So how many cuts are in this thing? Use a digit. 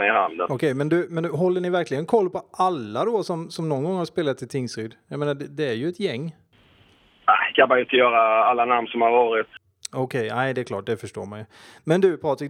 0